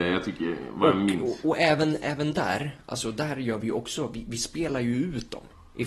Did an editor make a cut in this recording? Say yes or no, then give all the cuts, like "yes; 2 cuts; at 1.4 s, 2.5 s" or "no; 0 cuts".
no; 0 cuts